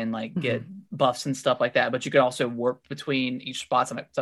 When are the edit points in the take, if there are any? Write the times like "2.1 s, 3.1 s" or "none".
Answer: none